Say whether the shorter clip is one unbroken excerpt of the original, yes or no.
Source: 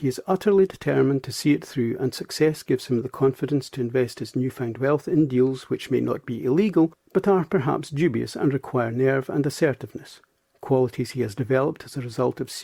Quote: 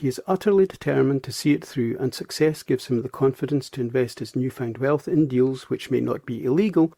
yes